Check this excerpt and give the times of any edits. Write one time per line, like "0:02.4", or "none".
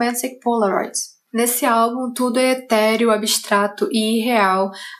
none